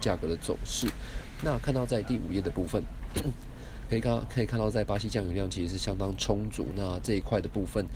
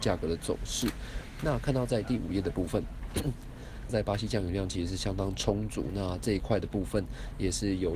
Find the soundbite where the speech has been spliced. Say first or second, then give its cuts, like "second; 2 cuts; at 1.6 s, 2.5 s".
second; 1 cut; at 3.9 s